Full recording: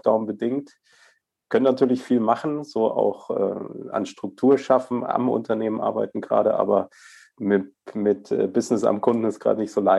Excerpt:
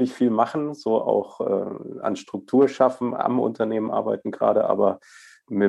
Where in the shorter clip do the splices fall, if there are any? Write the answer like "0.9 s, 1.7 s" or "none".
none